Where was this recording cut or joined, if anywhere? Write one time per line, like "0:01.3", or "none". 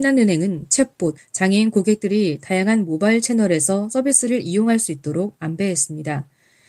0:01.2